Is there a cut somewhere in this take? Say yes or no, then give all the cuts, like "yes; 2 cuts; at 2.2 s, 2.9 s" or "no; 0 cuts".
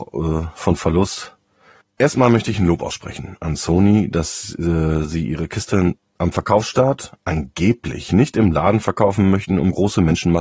yes; 1 cut; at 1.8 s